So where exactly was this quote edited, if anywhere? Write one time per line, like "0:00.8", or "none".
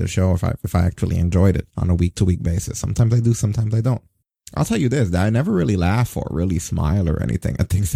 0:01.7